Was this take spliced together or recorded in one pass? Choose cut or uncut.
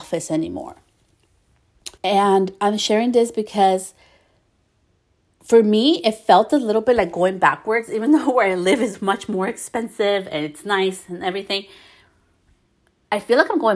cut